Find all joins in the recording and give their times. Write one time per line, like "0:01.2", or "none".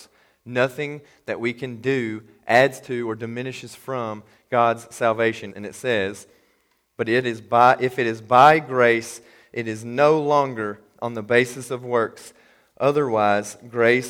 0:05.5